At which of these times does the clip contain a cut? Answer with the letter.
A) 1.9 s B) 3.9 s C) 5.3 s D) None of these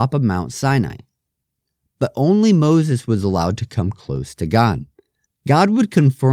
C